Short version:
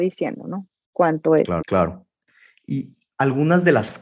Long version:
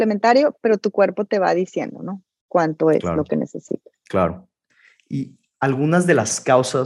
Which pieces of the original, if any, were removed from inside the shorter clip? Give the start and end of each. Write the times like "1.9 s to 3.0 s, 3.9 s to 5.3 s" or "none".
3.1 s to 4.0 s